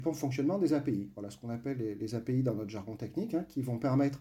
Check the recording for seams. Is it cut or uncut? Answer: uncut